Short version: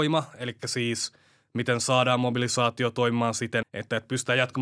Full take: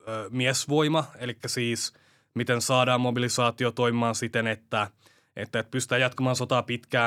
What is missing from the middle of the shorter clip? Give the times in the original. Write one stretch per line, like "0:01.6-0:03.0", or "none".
0:04.4-0:05.2